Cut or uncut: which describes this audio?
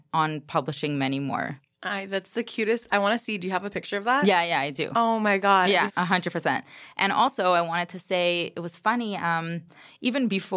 cut